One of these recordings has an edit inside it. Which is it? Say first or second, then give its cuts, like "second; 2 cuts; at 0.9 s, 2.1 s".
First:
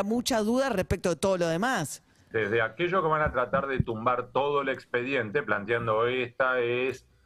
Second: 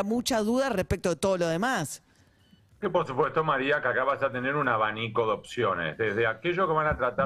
first; 1 cut; at 2.3 s